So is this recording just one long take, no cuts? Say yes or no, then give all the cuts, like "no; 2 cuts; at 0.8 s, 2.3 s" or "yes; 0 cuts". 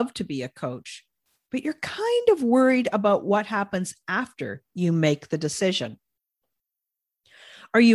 yes; 0 cuts